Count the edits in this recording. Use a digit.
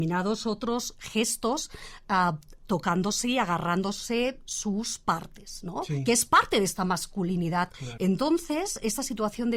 1